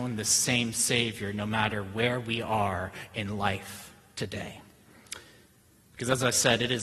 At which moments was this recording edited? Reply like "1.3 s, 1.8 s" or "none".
none